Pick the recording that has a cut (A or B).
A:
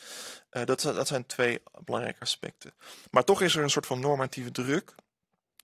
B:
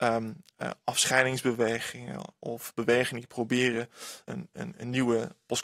B